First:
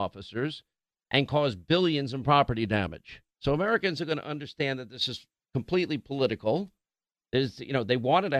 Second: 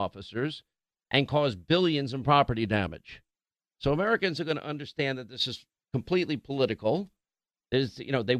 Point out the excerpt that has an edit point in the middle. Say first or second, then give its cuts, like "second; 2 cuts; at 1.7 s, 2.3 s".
first; 1 cut; at 3.3 s